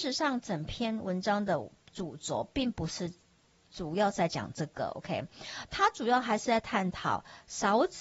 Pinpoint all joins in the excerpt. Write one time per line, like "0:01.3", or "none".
none